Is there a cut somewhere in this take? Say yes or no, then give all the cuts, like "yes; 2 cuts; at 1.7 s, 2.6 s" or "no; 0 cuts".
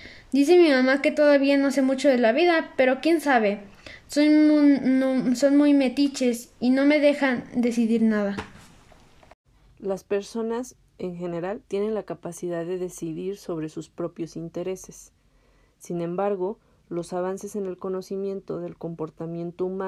yes; 1 cut; at 11.7 s